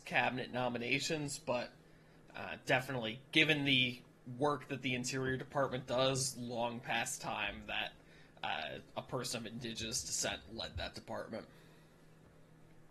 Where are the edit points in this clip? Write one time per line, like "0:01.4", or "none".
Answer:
none